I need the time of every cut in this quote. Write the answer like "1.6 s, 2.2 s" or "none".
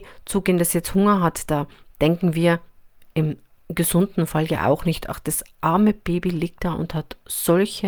none